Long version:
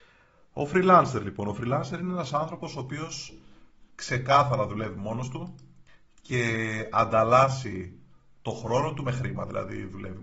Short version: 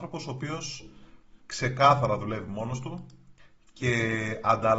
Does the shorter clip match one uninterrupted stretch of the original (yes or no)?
yes